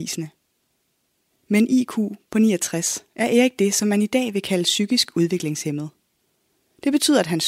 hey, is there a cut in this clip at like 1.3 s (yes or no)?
yes